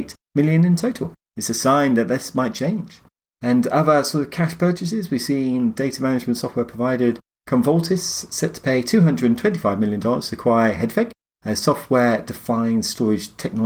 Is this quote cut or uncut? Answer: cut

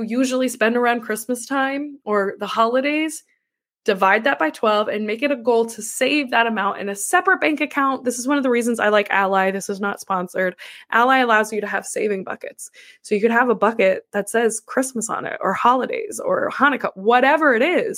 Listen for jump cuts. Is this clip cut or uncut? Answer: uncut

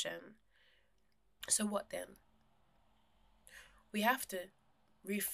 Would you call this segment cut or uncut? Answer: cut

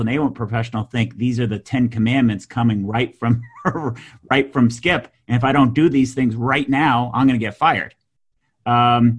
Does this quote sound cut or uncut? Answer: uncut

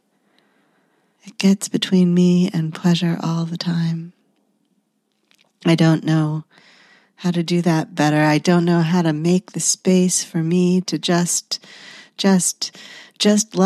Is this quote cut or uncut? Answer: uncut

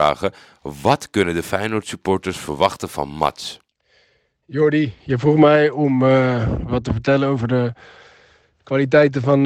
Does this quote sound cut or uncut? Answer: uncut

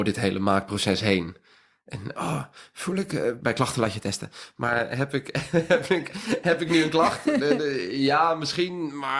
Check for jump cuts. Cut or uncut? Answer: cut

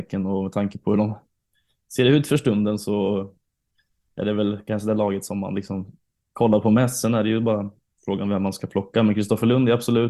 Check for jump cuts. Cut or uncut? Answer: uncut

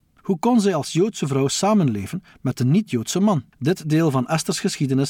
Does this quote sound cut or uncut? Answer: cut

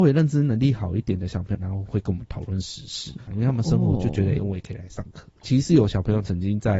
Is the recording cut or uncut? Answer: cut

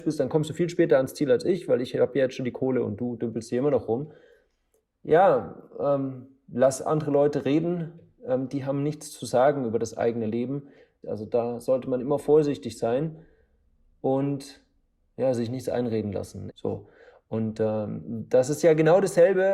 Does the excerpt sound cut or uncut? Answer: cut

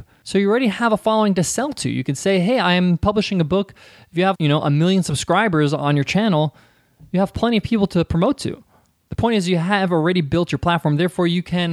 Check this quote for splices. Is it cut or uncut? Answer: cut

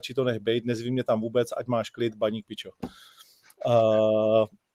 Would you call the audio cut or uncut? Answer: uncut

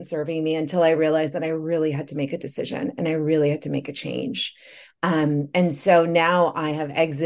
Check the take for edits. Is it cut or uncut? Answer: uncut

